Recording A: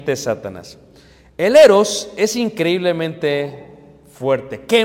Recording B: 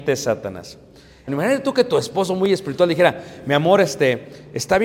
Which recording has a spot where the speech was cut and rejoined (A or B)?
B